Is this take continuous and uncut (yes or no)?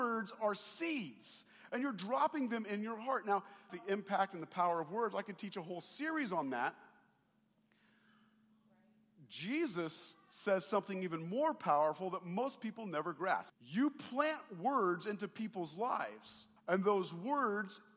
no